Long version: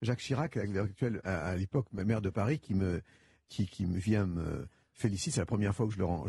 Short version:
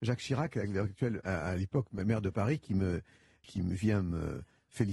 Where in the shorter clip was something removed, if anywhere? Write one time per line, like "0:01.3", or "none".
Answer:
0:03.4